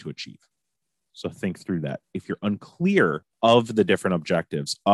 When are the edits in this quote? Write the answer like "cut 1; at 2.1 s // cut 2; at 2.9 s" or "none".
cut 1; at 1.1 s // cut 2; at 3.3 s